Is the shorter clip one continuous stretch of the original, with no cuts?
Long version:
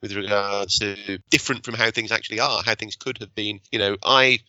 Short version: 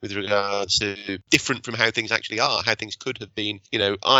yes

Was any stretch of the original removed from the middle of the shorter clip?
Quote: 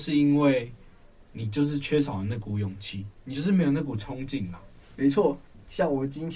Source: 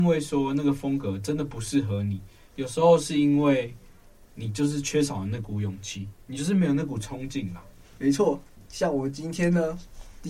no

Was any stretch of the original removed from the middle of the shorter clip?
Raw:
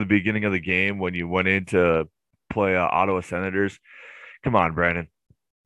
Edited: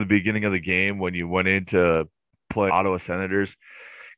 yes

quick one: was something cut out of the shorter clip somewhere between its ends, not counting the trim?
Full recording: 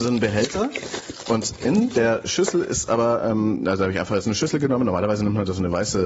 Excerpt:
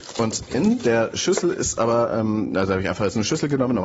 no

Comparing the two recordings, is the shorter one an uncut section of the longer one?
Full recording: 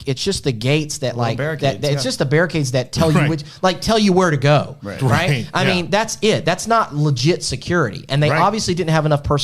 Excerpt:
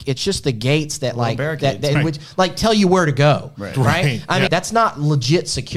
no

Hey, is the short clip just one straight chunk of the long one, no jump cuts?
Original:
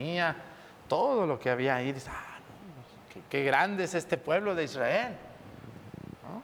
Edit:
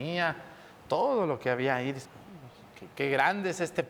no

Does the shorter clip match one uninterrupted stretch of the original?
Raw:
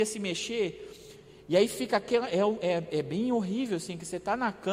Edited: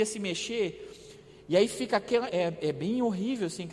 no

